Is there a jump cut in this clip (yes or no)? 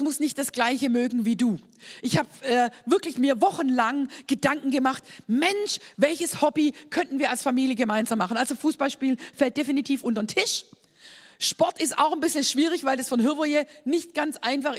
no